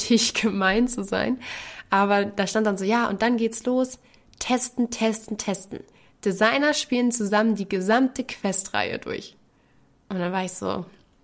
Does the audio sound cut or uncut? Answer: uncut